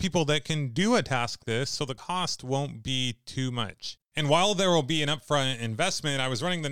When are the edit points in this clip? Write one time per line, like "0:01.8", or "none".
0:01.4